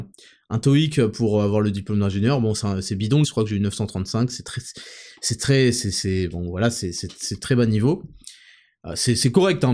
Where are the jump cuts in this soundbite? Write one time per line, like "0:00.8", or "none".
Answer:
0:03.2